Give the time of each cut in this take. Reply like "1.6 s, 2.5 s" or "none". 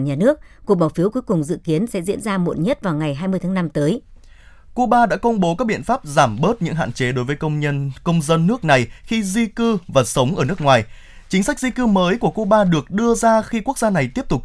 none